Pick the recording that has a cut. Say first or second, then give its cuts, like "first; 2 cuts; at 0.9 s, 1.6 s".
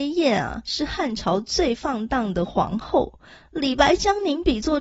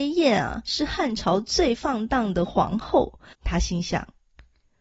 second; 1 cut; at 3.3 s